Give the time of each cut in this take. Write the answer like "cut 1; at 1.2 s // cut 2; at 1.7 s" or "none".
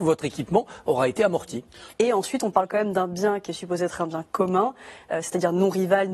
cut 1; at 1.9 s